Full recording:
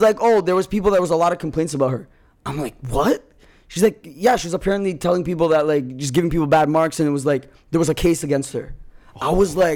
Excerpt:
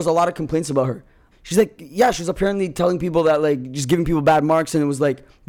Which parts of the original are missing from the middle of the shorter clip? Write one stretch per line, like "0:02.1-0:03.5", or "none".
0:02.3-0:03.6